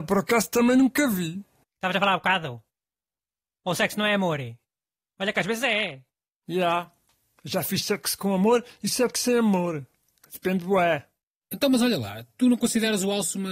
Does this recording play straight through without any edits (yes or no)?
no